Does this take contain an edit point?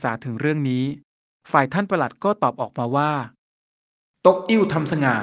no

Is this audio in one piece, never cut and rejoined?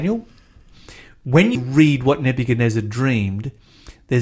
no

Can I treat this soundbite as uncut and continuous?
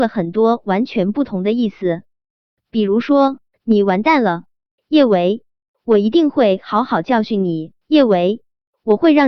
no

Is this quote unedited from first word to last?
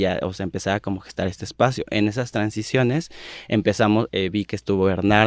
no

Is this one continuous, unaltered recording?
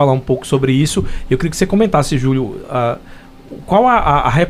yes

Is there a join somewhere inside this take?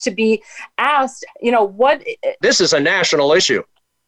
yes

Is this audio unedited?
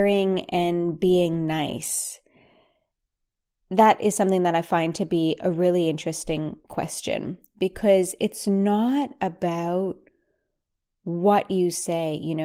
yes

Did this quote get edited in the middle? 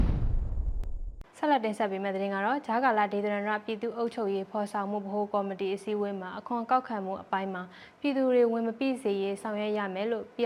yes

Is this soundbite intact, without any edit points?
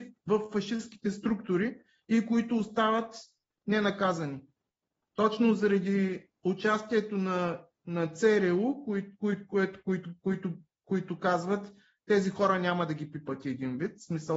yes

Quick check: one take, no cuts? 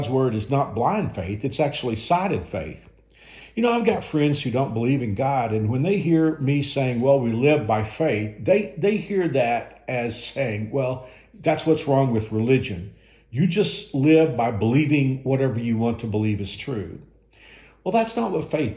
no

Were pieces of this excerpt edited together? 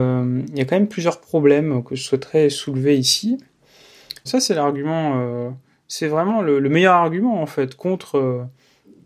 yes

